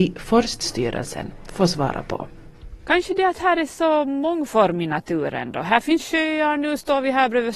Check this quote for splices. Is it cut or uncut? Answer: uncut